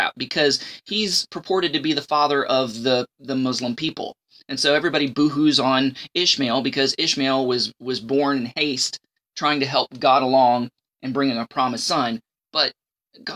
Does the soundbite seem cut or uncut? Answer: uncut